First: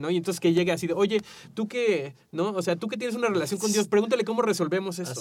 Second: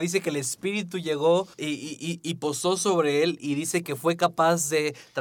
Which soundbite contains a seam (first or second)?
second